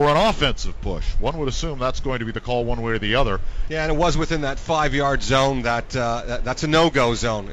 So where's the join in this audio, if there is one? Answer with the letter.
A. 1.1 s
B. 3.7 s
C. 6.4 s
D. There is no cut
B